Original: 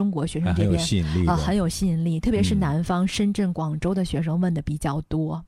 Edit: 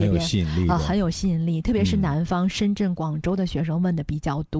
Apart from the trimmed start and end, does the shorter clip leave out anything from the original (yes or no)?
no